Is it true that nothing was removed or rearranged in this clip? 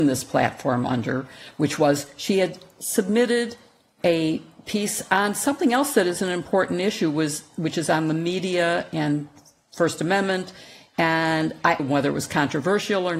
no; 1 cut; at 11.8 s

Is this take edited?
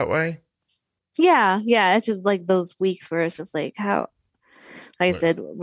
no; 0 cuts

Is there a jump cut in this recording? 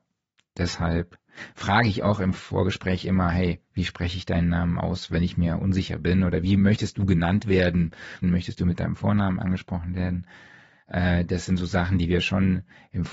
yes; 1 cut; at 8.2 s

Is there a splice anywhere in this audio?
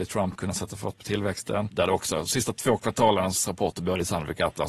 yes; 1 cut; at 1.7 s

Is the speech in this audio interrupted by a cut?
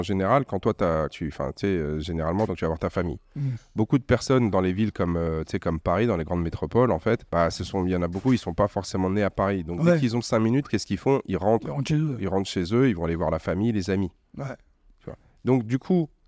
yes; 3 cuts; at 1.1 s, 2.5 s, 7.3 s

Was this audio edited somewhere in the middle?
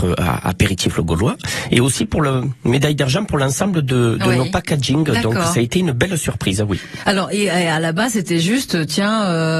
no; 0 cuts

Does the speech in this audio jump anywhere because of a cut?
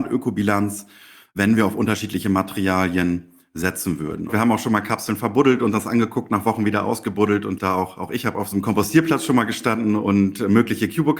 yes; 2 cuts; at 4.3 s, 7.6 s

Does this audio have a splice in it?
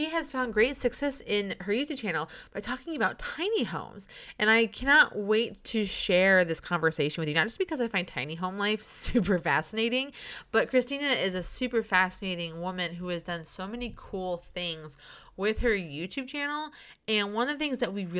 no; 0 cuts

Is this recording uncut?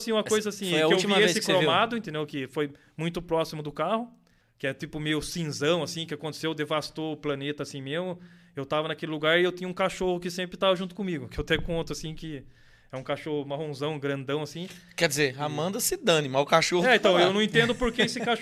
no; 1 cut; at 4.4 s

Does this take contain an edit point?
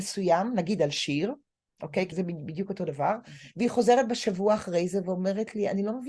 yes; 1 cut; at 2.1 s

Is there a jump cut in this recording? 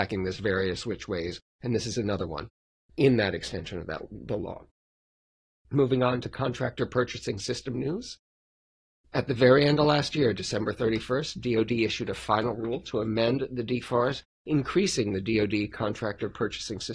no; 0 cuts

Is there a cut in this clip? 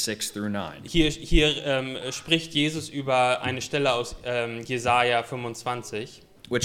no; 0 cuts

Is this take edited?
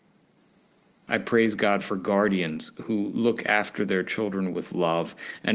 yes; 1 cut; at 0.9 s

